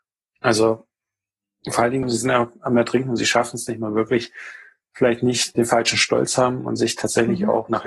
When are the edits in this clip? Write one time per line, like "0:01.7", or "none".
0:02.0